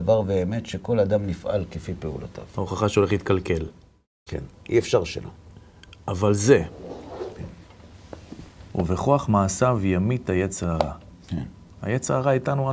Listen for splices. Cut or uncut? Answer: uncut